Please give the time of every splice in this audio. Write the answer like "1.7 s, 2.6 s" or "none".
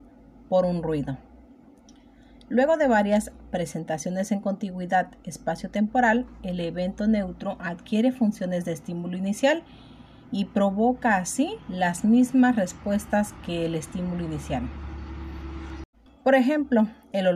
11.6 s, 16.1 s